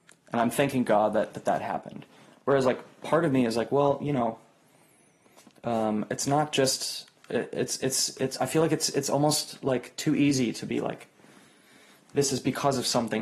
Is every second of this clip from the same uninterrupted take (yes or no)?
yes